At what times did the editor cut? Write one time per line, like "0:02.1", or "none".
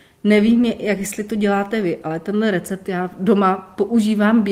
none